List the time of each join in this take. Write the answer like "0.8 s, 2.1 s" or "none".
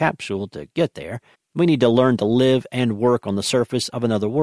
1.3 s